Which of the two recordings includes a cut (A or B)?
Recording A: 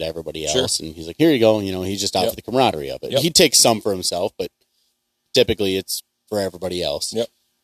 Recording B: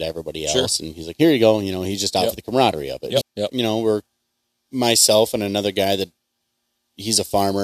B